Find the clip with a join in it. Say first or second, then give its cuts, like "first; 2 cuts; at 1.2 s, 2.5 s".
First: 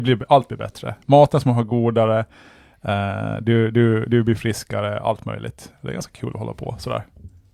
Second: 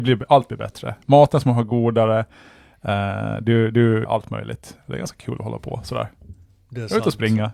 second; 1 cut; at 4.0 s